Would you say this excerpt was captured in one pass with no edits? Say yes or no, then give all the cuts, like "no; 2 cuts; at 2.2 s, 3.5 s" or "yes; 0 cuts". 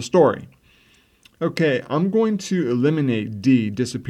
yes; 0 cuts